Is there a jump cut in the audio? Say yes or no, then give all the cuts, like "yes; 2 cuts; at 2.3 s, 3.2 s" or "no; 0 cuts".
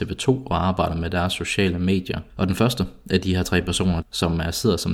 yes; 2 cuts; at 2.3 s, 4.0 s